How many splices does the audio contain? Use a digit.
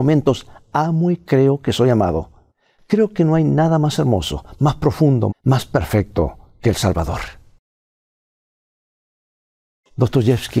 1